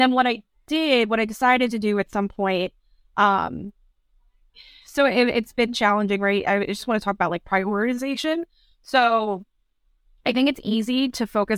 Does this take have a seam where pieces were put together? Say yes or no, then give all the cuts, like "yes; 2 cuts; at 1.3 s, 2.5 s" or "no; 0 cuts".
no; 0 cuts